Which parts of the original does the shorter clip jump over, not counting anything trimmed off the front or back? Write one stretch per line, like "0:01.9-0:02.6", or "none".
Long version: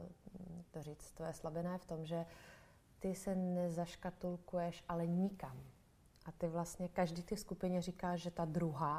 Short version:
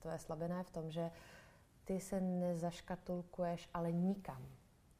none